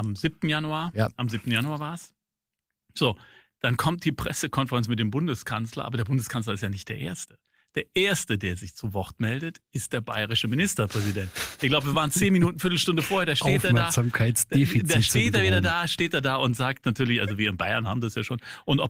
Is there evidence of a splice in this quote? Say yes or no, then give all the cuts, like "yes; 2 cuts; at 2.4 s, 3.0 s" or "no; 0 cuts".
no; 0 cuts